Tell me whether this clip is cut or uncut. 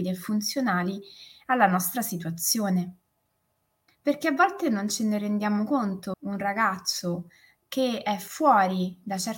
cut